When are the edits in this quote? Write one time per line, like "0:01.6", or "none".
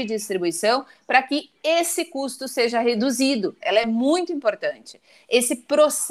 0:03.6